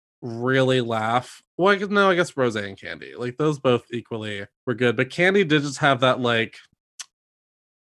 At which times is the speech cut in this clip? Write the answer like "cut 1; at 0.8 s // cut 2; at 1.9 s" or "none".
cut 1; at 4.5 s